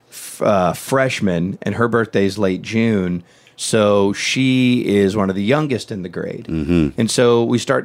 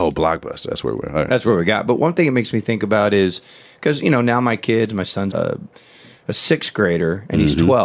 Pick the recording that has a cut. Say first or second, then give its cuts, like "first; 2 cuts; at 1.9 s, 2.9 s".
second; 1 cut; at 5.3 s